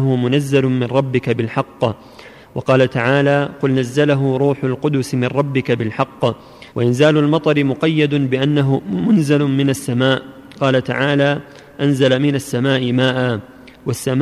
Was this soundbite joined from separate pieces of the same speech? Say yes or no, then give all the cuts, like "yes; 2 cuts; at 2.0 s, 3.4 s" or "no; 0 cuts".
yes; 1 cut; at 6.7 s